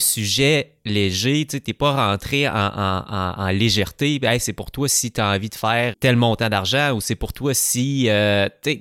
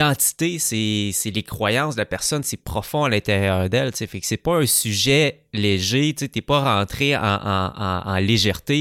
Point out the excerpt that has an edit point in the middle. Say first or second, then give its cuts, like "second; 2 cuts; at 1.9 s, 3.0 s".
first; 1 cut; at 5.9 s